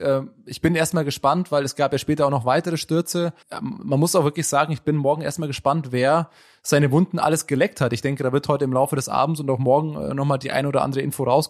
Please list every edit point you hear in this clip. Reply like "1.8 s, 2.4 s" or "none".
3.4 s